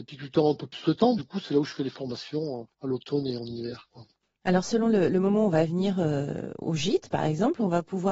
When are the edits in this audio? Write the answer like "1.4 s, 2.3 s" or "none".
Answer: none